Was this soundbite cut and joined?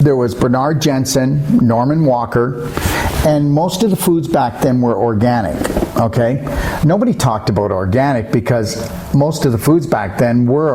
no; 0 cuts

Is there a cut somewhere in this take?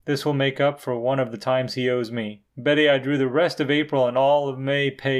yes; 1 cut; at 2.5 s

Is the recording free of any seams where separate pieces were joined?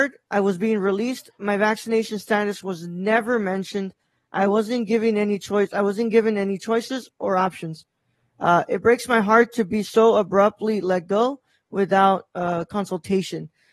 yes; 0 cuts

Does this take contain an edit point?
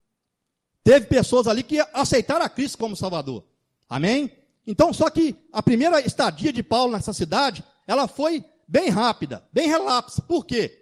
no; 0 cuts

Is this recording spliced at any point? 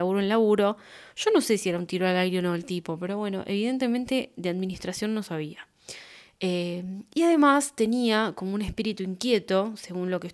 no; 0 cuts

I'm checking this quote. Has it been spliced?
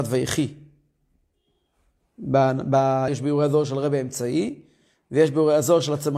yes; 1 cut; at 3.1 s

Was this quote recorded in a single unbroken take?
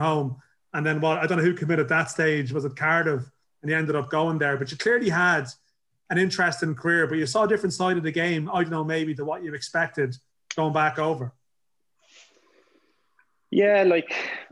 yes; 0 cuts

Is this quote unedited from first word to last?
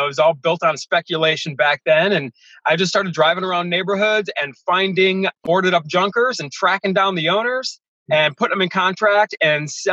no; 1 cut; at 5.4 s

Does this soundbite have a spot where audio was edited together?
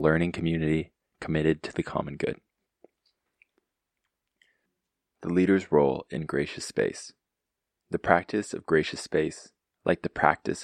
no; 0 cuts

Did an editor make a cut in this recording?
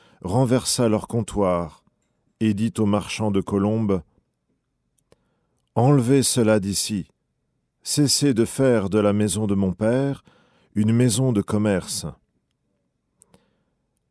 no; 0 cuts

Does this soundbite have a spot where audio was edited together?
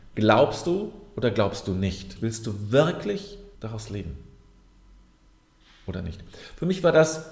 yes; 2 cuts; at 2.2 s, 3.5 s

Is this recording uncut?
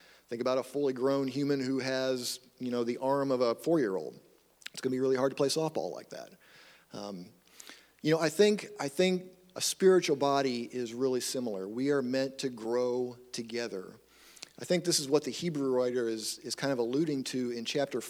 yes; 0 cuts

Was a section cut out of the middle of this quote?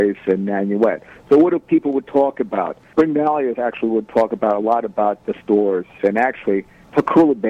yes; 1 cut; at 5.2 s

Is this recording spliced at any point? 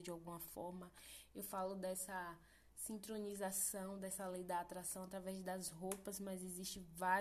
no; 0 cuts

